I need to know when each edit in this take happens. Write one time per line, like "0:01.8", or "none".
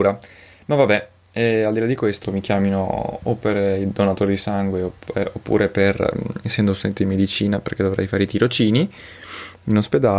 0:02.2